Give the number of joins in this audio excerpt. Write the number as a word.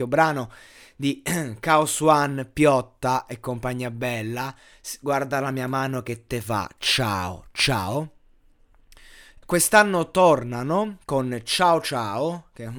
one